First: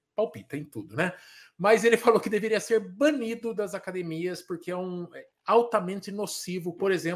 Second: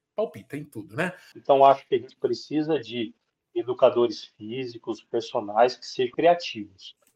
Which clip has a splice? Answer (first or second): second